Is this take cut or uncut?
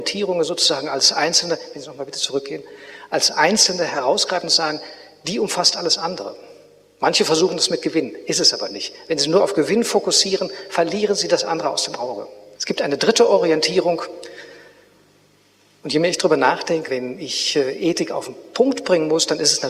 cut